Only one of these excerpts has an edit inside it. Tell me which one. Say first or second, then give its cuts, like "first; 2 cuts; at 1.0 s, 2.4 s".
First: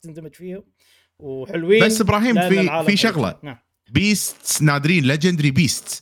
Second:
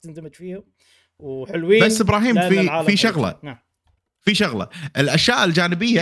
first; 1 cut; at 3.9 s